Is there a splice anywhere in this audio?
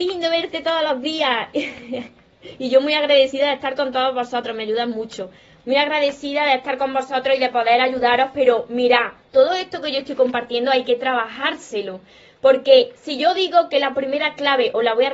no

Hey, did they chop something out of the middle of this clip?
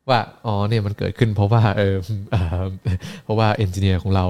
no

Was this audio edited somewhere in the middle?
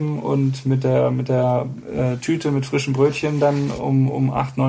no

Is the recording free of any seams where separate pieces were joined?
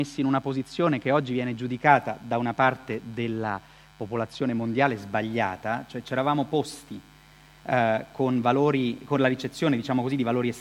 yes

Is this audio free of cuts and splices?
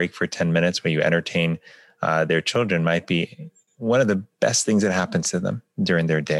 yes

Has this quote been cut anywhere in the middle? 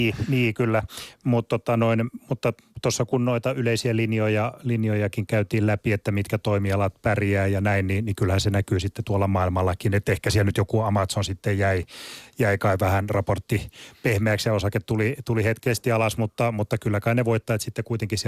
no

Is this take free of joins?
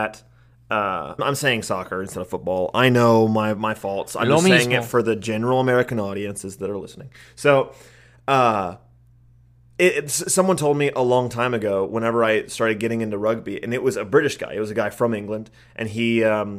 no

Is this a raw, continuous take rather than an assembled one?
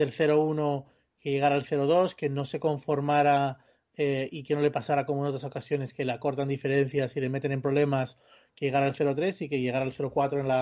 yes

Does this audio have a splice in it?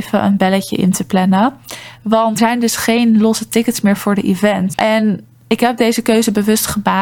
yes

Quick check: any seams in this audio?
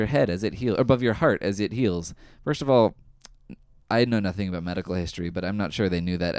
no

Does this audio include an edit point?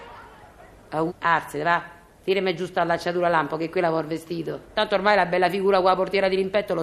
yes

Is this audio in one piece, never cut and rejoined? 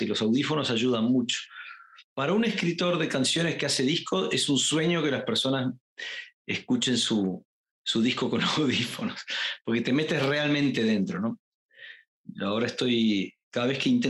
yes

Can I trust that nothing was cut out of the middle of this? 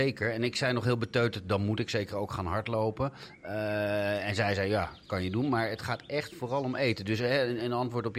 yes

